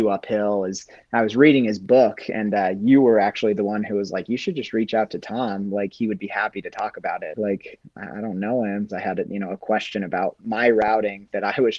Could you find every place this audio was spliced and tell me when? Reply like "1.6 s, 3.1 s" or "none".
7.4 s, 8.9 s